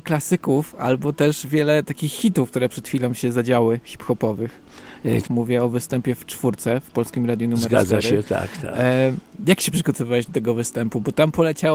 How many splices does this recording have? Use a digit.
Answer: 1